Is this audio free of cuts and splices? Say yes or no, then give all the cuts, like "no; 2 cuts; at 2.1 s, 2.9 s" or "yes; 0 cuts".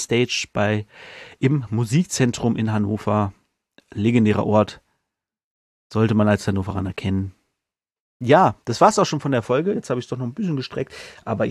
yes; 0 cuts